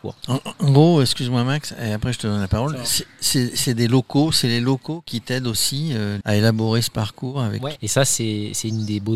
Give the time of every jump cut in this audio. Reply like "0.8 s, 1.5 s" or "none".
6.2 s, 7.8 s